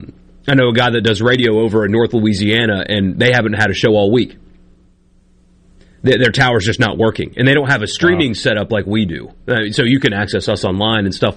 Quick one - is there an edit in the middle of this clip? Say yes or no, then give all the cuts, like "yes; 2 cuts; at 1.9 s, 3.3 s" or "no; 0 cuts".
no; 0 cuts